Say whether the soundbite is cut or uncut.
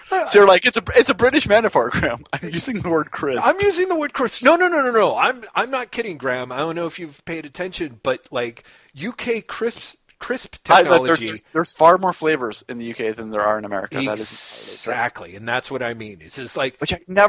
uncut